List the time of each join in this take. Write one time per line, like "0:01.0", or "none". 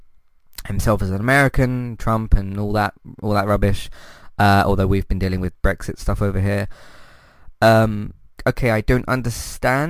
0:08.4